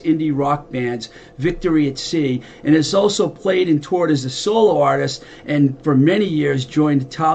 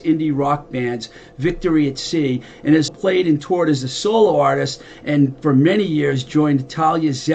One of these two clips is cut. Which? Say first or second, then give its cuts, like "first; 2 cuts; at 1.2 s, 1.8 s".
second; 1 cut; at 2.9 s